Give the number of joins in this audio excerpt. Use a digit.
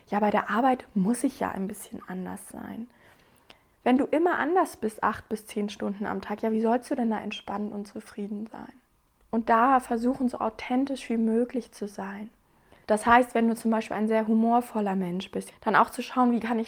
3